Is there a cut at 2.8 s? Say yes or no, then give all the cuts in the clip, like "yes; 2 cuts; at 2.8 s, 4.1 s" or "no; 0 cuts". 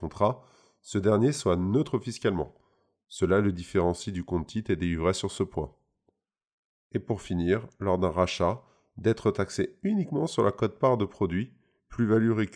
no; 0 cuts